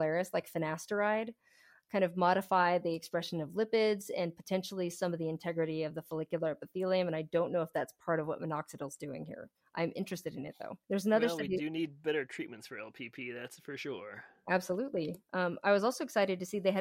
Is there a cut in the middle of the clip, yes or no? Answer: yes